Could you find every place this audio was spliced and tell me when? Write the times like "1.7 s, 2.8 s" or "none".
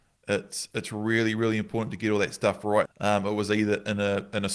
2.8 s